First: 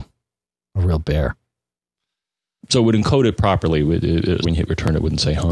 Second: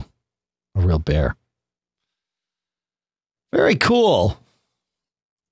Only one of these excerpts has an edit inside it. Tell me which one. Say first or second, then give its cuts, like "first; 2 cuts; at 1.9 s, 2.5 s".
first; 2 cuts; at 2.6 s, 4.4 s